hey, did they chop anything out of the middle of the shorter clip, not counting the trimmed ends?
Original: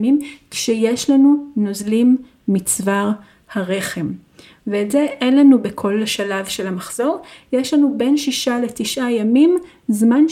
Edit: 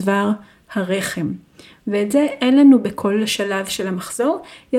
no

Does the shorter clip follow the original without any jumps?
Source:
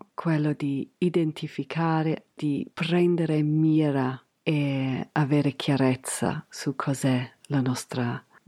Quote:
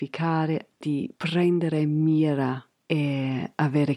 yes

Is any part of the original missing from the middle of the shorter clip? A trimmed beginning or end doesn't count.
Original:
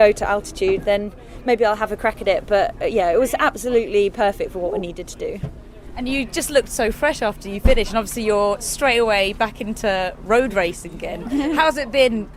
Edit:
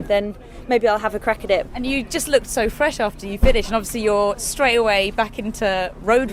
yes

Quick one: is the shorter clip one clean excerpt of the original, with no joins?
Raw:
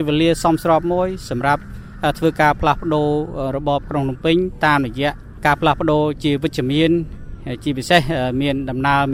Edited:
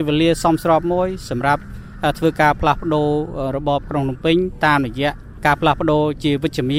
yes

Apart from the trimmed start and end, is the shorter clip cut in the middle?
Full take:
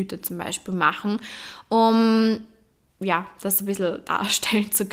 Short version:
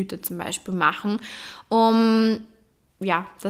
no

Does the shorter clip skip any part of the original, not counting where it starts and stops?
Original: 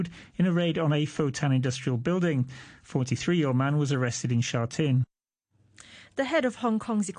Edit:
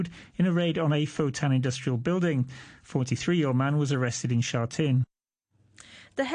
no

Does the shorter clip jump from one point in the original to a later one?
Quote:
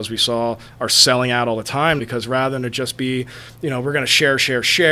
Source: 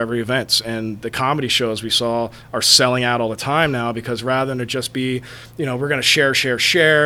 yes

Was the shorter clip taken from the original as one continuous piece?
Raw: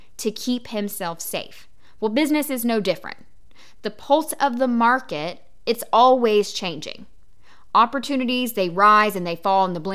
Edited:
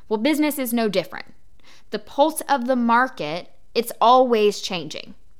yes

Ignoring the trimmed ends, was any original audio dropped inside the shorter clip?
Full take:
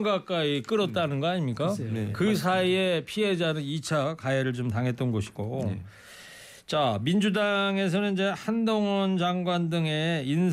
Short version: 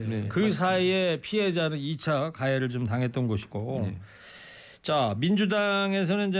no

